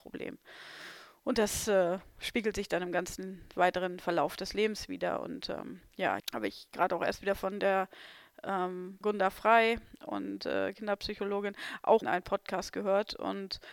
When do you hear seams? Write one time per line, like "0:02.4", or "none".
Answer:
0:06.2
0:09.0
0:12.0